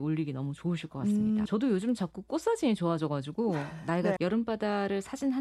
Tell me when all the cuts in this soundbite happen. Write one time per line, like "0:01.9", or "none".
0:01.5
0:04.2